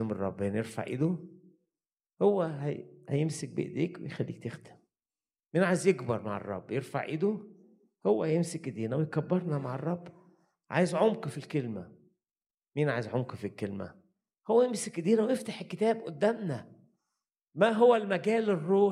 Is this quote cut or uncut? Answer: uncut